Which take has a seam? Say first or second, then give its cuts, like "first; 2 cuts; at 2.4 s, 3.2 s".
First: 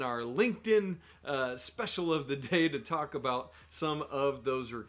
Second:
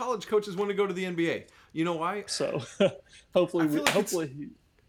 second; 1 cut; at 2.3 s